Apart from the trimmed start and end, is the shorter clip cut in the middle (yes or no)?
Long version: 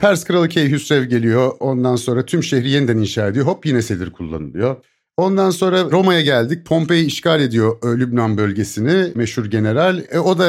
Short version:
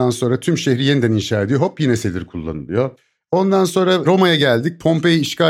no